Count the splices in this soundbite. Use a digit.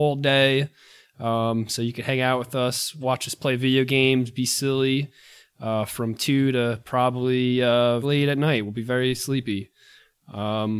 1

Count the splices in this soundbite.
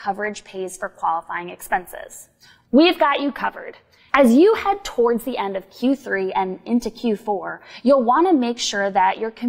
2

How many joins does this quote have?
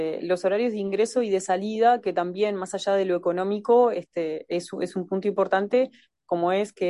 0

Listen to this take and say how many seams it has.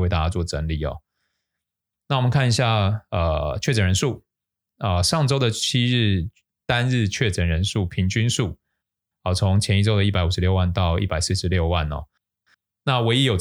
0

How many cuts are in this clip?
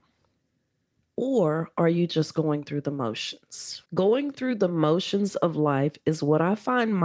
1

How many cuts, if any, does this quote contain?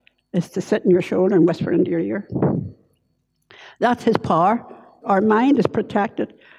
1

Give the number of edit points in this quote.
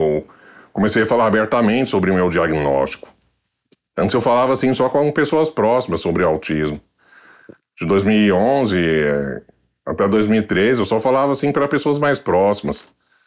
0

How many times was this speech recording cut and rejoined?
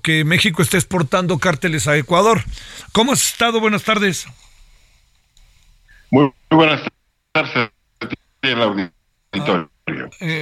0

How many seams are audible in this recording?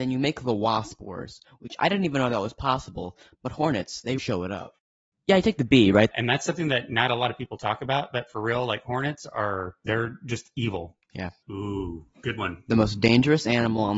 3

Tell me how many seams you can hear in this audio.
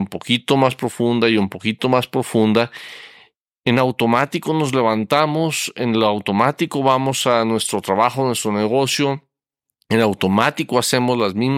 1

